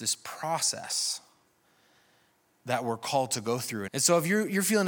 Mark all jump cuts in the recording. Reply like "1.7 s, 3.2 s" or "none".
3.9 s